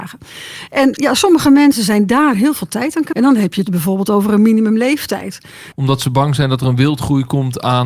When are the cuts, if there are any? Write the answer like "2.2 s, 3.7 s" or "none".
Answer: 3.1 s, 5.7 s